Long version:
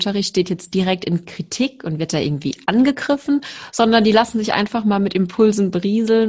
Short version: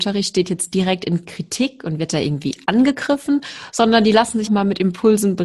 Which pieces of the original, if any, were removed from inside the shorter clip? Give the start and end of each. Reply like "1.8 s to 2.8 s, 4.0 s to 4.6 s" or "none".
4.5 s to 4.8 s